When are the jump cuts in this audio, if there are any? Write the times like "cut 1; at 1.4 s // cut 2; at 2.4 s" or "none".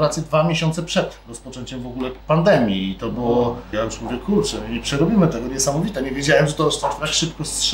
cut 1; at 2.2 s // cut 2; at 3.7 s